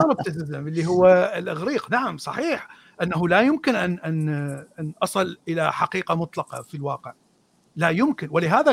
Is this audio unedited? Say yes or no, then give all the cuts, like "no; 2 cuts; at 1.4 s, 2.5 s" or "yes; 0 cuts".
yes; 0 cuts